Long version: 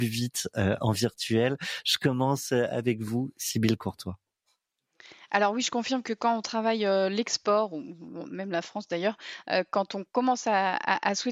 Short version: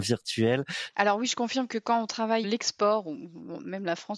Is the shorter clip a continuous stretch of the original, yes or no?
no